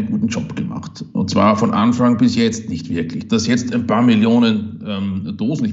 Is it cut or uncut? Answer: uncut